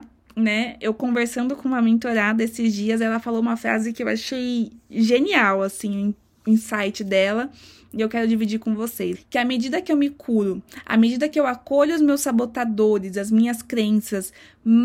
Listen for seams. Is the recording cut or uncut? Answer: cut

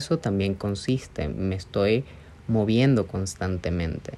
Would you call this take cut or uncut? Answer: uncut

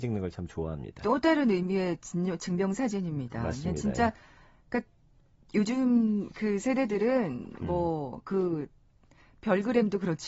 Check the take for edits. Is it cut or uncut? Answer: uncut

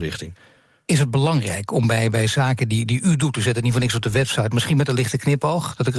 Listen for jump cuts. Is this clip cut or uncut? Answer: uncut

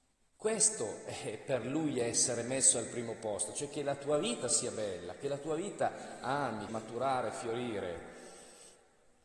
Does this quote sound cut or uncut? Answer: cut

